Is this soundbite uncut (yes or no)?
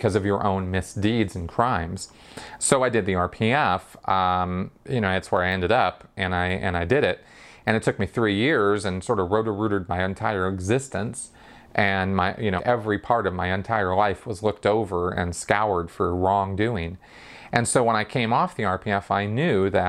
no